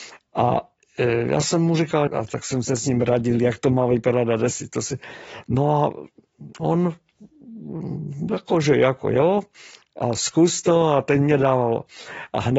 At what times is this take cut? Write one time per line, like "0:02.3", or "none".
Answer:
0:02.1